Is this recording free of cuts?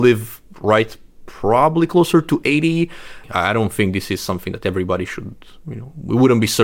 no; 1 cut; at 3.2 s

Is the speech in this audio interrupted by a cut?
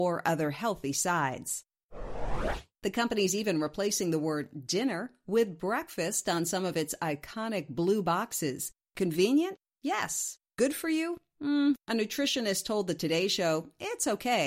yes; 1 cut; at 2.7 s

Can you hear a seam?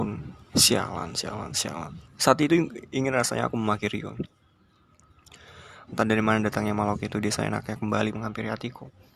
yes; 2 cuts; at 2.0 s, 5.9 s

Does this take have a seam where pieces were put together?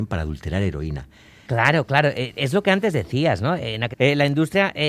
yes; 2 cuts; at 1.5 s, 3.9 s

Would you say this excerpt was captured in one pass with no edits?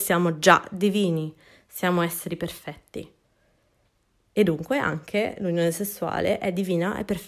yes; 0 cuts

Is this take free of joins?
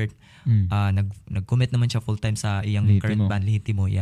yes; 0 cuts

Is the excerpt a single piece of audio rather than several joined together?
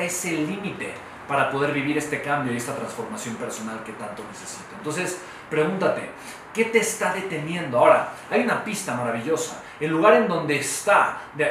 yes; 0 cuts

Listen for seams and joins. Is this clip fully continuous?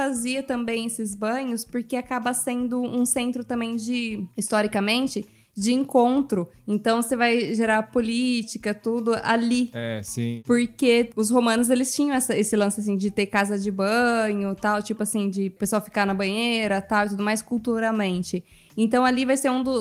yes; 0 cuts

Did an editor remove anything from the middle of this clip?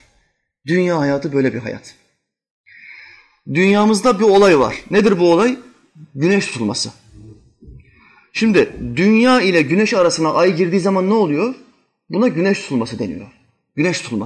no; 0 cuts

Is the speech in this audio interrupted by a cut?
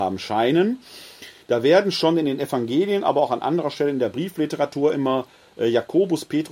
no; 0 cuts

